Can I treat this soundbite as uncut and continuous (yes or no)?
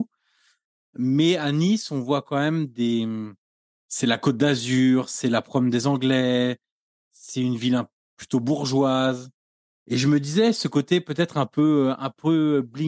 no